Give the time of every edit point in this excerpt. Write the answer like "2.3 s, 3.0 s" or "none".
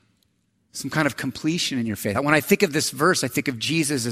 none